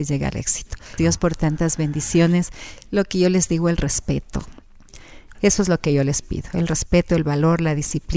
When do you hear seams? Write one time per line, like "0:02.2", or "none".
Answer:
0:01.0
0:02.8
0:05.3